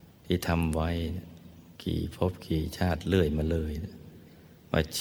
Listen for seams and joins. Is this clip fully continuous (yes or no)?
no